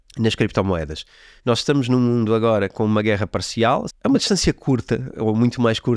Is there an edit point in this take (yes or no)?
yes